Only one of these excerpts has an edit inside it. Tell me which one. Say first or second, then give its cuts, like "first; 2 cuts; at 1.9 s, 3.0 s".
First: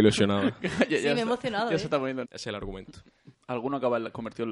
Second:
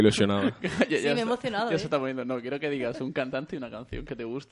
first; 2 cuts; at 2.2 s, 3.3 s